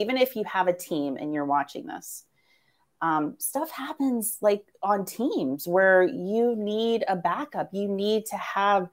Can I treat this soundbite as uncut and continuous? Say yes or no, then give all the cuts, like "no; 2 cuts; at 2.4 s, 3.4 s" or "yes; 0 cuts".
yes; 0 cuts